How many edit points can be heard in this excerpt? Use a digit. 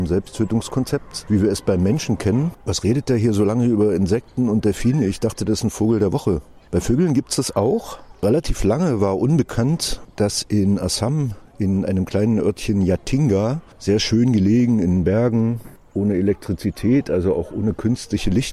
0